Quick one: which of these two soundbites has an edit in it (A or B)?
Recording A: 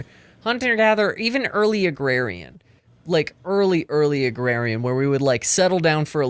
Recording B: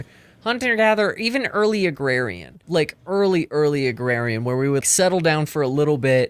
B